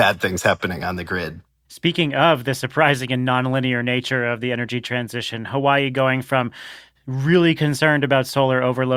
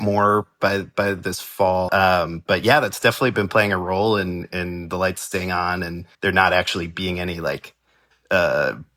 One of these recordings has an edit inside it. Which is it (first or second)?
second